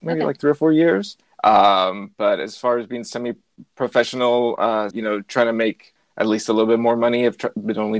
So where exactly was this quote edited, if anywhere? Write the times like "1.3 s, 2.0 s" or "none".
1.2 s, 4.9 s